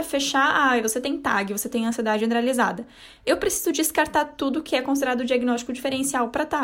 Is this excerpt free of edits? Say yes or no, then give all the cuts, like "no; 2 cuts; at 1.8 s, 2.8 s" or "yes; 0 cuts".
yes; 0 cuts